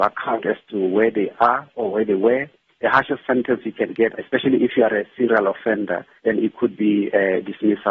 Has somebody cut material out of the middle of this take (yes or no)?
yes